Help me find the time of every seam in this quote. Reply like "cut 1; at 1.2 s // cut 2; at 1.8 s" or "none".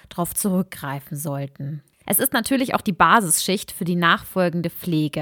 cut 1; at 2.0 s